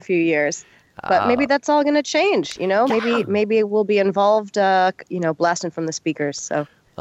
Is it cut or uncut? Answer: uncut